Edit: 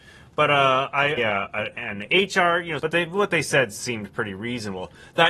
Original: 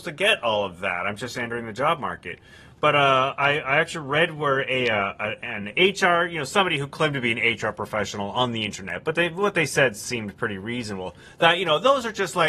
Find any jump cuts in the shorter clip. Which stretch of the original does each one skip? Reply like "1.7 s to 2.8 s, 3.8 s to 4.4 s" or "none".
3.6 s to 4.8 s, 6.5 s to 9.0 s